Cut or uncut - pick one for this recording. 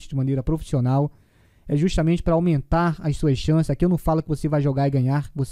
uncut